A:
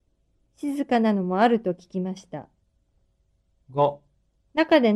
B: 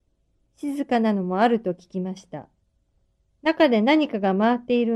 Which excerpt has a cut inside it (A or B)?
B